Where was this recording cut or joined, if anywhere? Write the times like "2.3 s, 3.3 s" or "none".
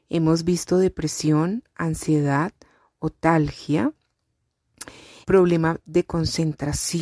5.2 s